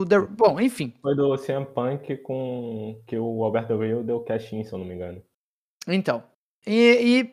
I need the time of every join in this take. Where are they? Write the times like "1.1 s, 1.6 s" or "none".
1.0 s